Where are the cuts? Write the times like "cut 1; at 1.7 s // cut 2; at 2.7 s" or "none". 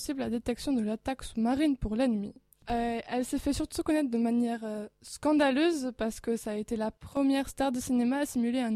cut 1; at 2.5 s

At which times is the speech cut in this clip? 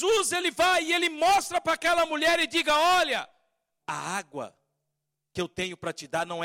none

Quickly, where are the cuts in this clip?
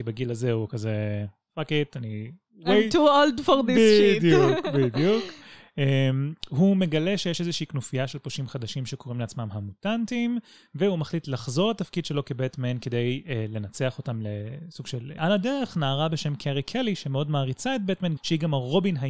cut 1; at 15.2 s // cut 2; at 18.2 s

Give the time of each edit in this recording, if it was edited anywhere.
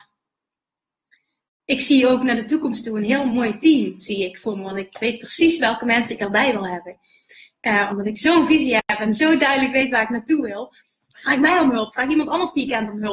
cut 1; at 7.9 s // cut 2; at 11.1 s

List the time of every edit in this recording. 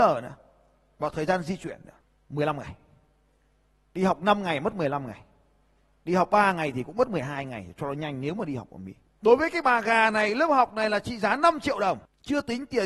cut 1; at 9.2 s

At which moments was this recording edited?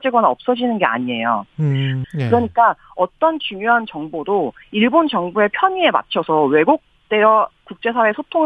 cut 1; at 2.0 s

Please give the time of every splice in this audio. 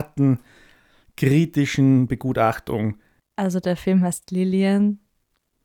cut 1; at 3.2 s

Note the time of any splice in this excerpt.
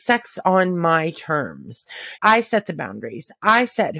cut 1; at 2.2 s

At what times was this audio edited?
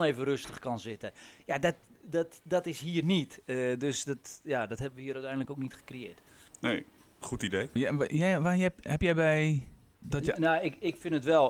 cut 1; at 7.8 s // cut 2; at 9.9 s

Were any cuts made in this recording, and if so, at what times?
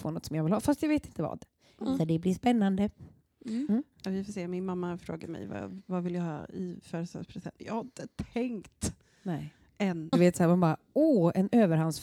cut 1; at 7.6 s // cut 2; at 10.1 s

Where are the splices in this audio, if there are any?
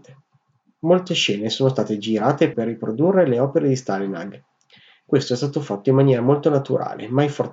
cut 1; at 2.5 s

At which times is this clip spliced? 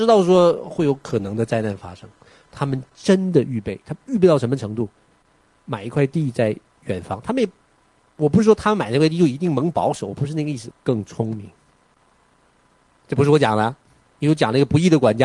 cut 1; at 10.7 s // cut 2; at 14.1 s

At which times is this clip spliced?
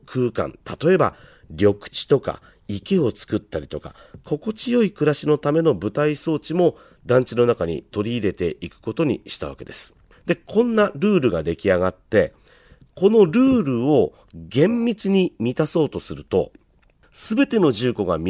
cut 1; at 10.1 s

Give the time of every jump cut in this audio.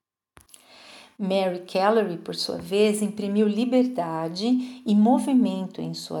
none

